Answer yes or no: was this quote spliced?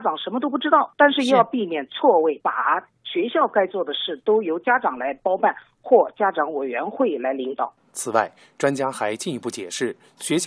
no